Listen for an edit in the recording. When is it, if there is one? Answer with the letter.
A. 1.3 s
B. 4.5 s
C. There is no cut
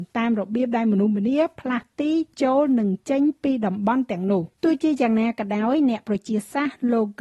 B